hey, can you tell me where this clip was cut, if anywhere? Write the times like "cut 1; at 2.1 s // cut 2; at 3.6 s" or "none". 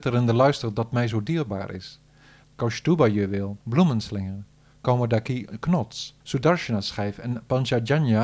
cut 1; at 2.4 s // cut 2; at 3.6 s // cut 3; at 6.2 s